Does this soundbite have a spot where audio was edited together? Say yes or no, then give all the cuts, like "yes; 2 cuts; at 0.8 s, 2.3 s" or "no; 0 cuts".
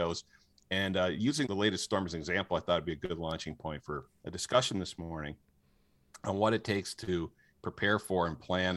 yes; 1 cut; at 1.4 s